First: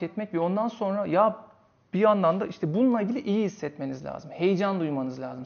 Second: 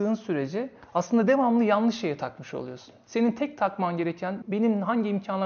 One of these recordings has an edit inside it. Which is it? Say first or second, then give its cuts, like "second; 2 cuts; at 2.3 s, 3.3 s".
second; 1 cut; at 4.4 s